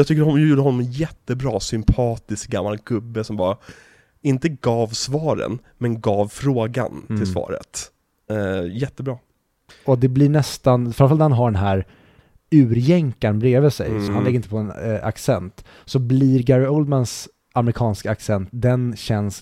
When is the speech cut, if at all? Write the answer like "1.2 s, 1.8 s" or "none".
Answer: 9.7 s, 14.1 s